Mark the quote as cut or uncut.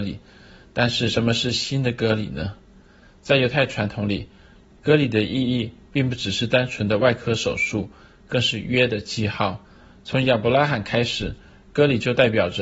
uncut